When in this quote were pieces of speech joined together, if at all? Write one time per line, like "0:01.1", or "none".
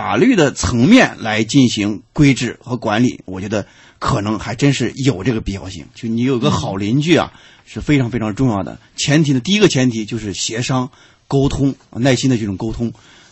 0:05.9